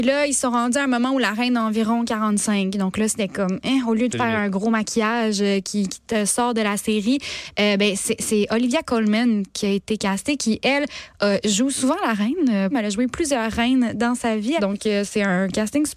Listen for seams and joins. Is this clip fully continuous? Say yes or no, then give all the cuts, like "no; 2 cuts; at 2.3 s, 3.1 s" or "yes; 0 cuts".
no; 2 cuts; at 12.7 s, 14.6 s